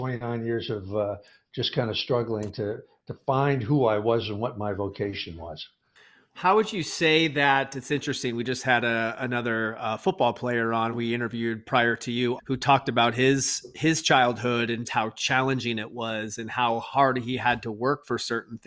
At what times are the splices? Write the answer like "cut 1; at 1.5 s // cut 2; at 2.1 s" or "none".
cut 1; at 12.4 s // cut 2; at 14.9 s